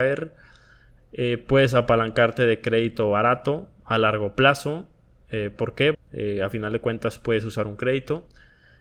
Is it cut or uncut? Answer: cut